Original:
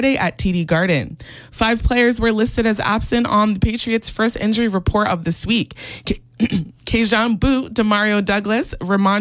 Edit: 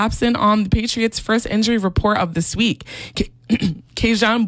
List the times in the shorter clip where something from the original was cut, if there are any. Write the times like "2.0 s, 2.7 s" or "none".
none